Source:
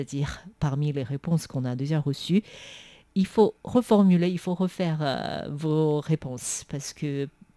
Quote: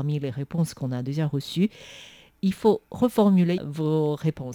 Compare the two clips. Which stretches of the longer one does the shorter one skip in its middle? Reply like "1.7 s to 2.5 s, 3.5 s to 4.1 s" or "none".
4.3 s to 5.4 s